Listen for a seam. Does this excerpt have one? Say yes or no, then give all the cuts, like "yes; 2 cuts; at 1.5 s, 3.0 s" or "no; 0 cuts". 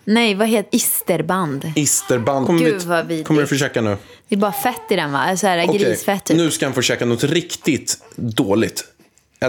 yes; 1 cut; at 2.5 s